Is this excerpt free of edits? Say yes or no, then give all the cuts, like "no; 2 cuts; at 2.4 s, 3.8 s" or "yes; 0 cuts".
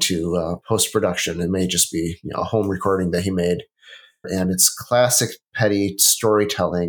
no; 1 cut; at 4.2 s